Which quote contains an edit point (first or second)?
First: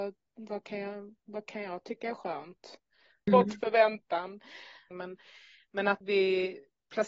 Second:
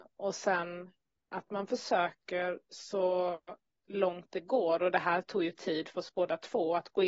first